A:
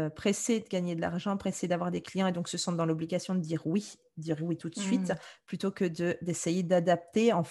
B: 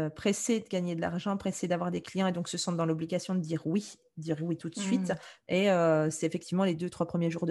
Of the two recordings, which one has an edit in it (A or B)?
B